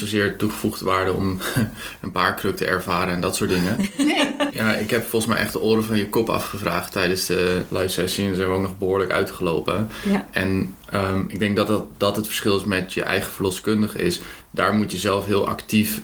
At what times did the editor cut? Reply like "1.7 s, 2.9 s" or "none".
4.5 s